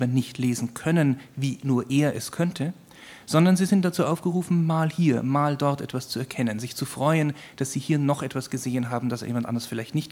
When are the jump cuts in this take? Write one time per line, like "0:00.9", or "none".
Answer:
none